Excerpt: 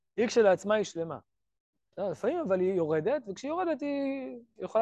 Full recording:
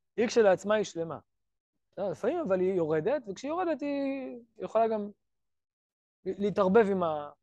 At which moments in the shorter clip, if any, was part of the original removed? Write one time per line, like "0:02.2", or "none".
none